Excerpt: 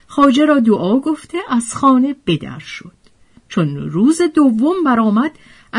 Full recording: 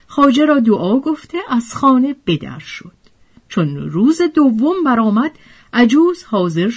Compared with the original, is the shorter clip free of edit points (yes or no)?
yes